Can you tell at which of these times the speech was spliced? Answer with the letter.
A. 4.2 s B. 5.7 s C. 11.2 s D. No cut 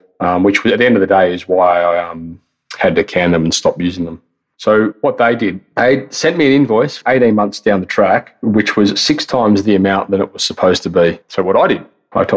C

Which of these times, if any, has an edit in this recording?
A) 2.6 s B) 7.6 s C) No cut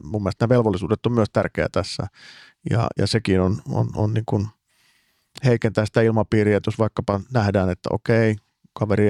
C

